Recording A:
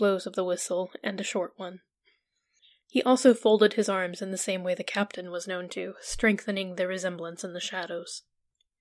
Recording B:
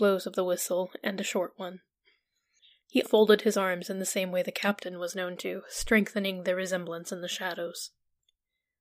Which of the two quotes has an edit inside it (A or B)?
B